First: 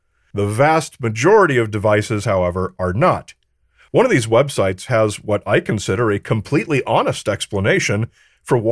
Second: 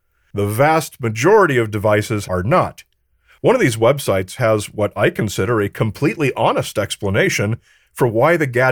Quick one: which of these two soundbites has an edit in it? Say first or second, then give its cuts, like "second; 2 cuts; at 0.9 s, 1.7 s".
second; 1 cut; at 2.2 s